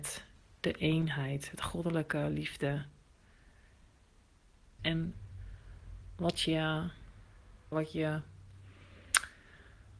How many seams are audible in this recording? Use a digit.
2